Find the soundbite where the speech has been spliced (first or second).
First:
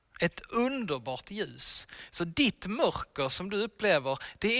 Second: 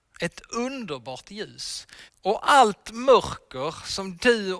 second